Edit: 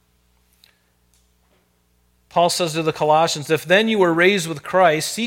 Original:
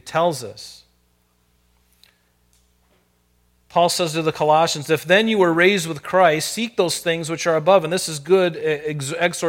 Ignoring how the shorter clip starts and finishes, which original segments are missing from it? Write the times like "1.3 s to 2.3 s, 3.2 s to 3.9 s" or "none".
none